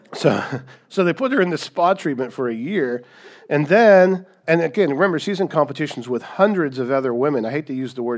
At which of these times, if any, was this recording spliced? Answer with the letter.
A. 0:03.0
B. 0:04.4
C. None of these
B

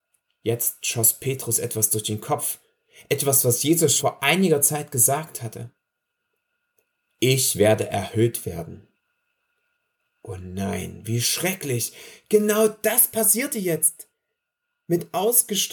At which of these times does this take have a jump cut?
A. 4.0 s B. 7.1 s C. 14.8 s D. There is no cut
A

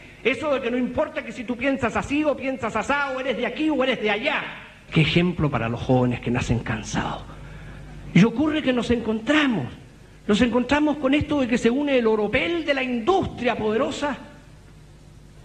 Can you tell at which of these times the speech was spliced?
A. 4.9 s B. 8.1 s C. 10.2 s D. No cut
A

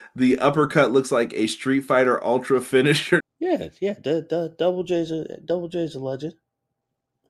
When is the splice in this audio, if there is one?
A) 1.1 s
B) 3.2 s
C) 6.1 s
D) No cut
B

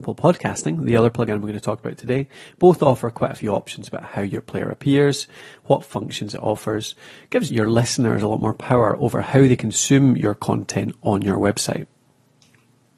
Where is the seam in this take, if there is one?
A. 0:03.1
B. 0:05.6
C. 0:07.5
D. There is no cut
C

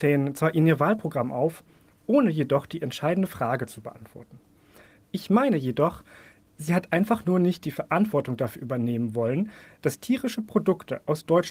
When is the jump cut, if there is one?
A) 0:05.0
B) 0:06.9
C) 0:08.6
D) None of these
A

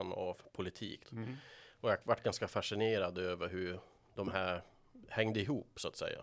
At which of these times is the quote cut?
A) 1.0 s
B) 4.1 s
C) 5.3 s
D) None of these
A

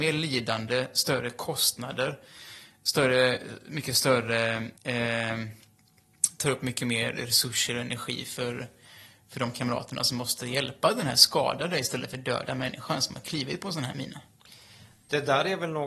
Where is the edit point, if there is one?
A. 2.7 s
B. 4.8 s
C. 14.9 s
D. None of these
B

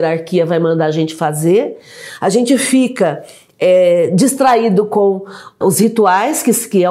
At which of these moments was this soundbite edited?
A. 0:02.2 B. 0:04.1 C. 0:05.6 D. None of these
C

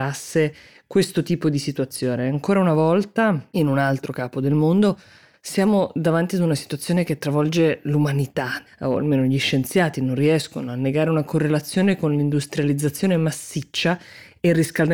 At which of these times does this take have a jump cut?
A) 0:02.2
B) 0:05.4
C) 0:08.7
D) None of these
C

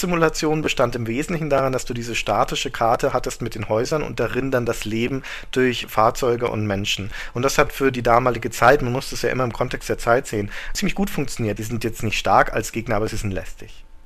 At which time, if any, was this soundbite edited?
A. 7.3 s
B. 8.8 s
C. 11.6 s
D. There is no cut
C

